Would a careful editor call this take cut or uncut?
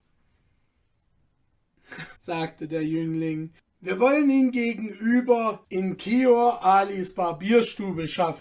cut